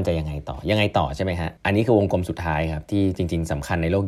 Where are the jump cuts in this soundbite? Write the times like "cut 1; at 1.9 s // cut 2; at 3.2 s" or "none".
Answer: cut 1; at 1.6 s